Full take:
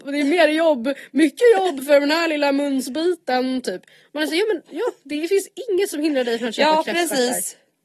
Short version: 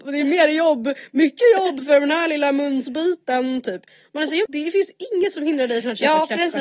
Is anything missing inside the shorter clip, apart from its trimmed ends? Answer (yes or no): yes